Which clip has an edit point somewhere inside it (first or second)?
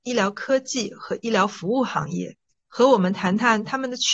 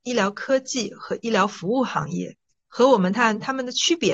second